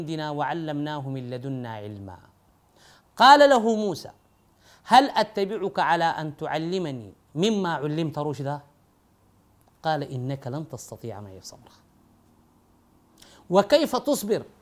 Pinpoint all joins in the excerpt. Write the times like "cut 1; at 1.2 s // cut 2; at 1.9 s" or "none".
none

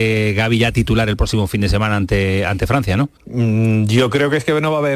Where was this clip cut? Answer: cut 1; at 3.2 s

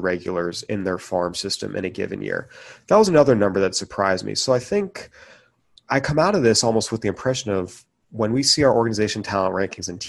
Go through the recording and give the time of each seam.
none

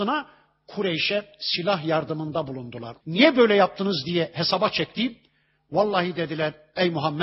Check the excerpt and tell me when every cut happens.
cut 1; at 3.0 s

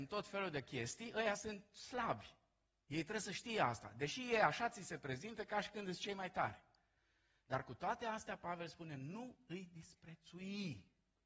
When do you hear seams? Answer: none

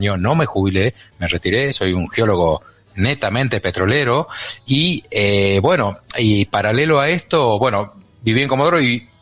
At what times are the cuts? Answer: none

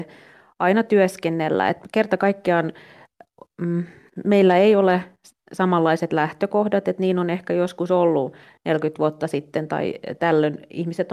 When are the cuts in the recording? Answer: none

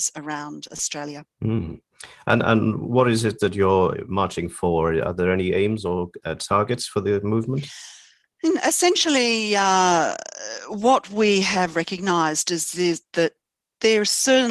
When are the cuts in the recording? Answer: cut 1; at 1.3 s

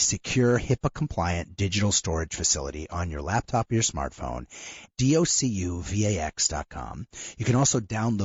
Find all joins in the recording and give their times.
cut 1; at 4.9 s

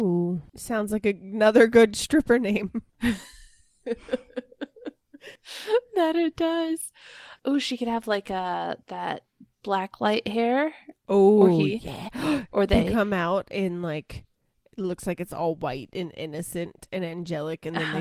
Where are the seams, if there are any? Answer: none

